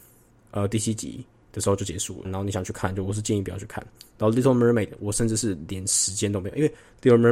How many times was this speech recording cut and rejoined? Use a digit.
1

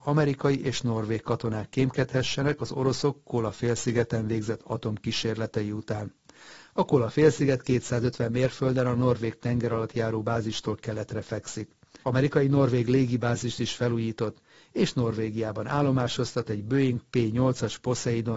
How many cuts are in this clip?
1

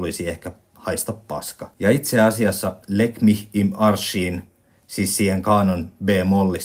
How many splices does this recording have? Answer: 1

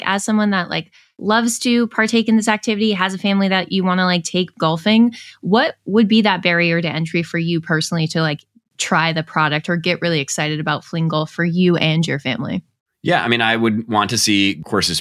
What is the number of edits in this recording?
0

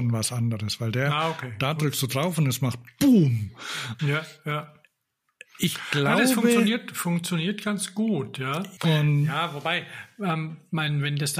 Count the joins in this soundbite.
2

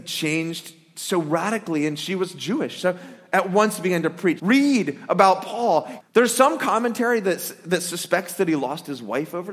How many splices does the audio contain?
2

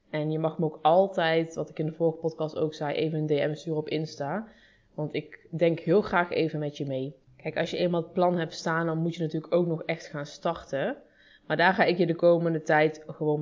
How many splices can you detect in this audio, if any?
1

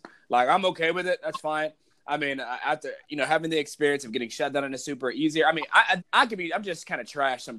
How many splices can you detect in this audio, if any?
1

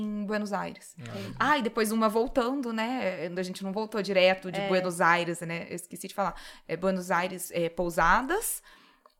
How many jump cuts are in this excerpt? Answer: 0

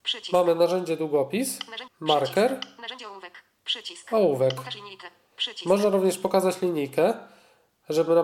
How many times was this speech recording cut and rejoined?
1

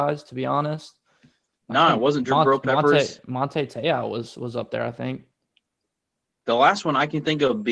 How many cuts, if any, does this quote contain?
1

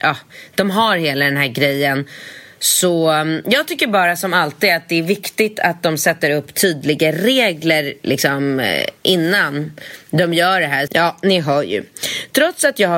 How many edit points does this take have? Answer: 1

